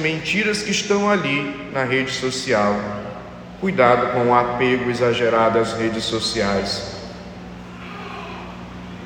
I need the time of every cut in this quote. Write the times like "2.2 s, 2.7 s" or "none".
none